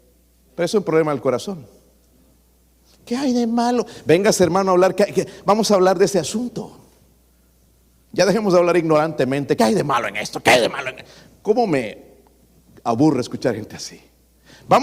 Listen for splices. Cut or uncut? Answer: uncut